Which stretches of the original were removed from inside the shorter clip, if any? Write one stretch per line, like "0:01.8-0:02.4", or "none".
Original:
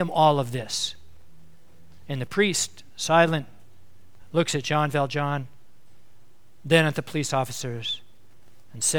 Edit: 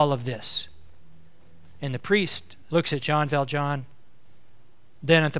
0:03.0-0:04.3